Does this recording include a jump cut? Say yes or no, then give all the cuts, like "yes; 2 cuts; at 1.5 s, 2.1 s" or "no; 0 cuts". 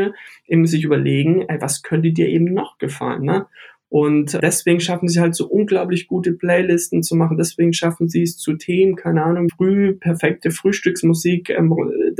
yes; 2 cuts; at 4.4 s, 9.5 s